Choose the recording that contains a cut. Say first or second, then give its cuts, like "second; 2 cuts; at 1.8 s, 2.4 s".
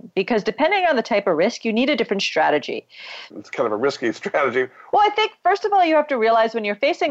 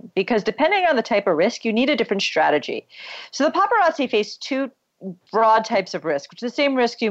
first; 2 cuts; at 3.3 s, 4.9 s